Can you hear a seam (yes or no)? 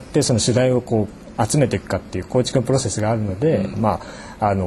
yes